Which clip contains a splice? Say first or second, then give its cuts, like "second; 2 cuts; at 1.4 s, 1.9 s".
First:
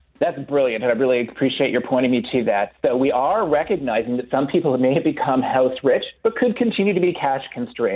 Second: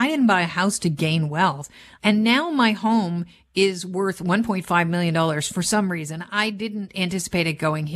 second; 1 cut; at 2.0 s